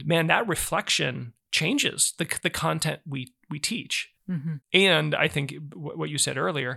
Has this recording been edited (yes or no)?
no